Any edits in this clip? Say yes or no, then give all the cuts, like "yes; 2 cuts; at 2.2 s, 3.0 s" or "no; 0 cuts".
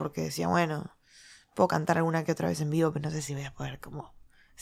no; 0 cuts